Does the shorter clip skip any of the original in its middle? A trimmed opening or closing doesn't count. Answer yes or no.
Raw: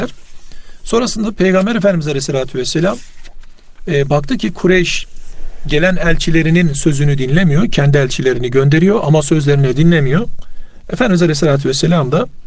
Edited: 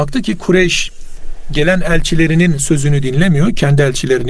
no